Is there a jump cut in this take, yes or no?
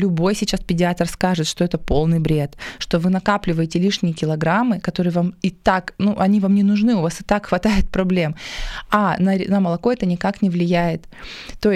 no